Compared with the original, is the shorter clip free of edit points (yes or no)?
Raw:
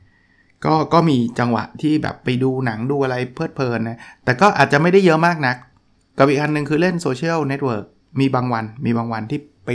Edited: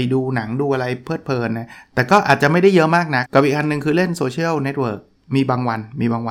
no